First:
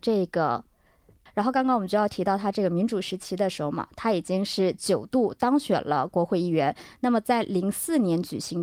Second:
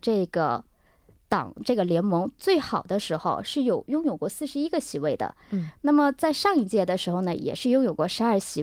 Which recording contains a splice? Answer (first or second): first